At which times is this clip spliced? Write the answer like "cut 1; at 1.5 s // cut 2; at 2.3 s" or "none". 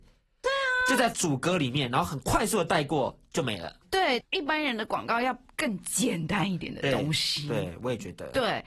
cut 1; at 3.8 s